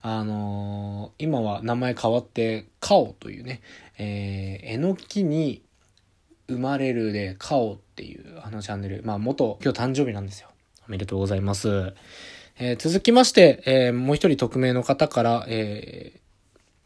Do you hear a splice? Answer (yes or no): yes